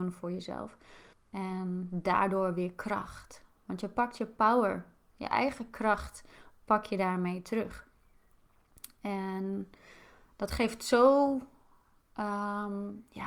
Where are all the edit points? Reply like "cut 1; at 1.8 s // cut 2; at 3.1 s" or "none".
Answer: cut 1; at 1.1 s